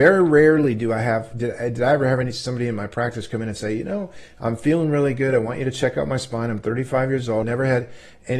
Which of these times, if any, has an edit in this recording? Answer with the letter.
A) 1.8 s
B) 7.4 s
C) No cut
B